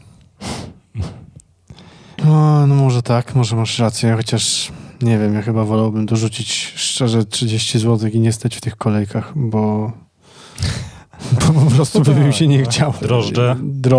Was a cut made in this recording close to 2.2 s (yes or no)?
yes